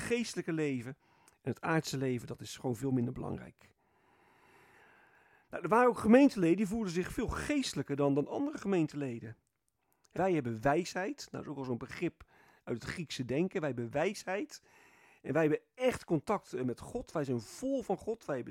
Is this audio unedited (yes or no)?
no